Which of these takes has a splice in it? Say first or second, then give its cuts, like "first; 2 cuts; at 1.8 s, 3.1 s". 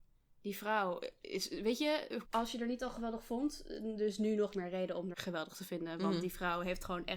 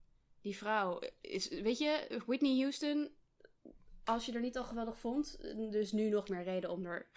first; 2 cuts; at 2.2 s, 5.1 s